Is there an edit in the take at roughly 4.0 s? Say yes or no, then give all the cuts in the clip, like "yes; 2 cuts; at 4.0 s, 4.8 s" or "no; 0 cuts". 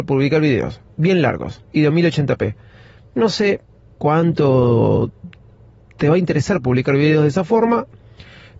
yes; 1 cut; at 4.0 s